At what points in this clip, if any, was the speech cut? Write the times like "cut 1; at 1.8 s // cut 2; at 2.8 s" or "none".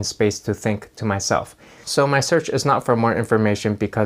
cut 1; at 1.8 s